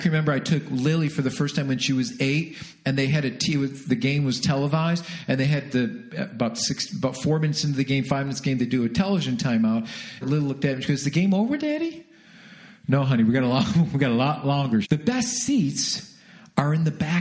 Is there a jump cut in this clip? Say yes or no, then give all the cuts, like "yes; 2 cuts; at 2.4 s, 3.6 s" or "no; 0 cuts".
yes; 3 cuts; at 10.2 s, 11.6 s, 14.8 s